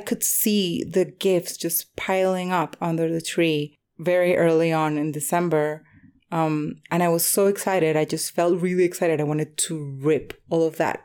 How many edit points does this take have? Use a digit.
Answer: 0